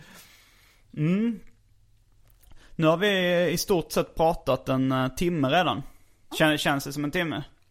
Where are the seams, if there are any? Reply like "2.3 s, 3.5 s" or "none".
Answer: 6.3 s